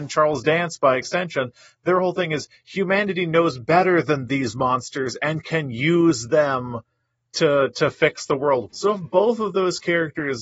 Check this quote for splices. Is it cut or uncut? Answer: cut